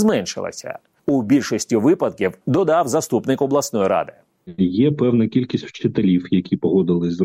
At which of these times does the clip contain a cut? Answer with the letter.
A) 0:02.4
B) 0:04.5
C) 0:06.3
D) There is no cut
A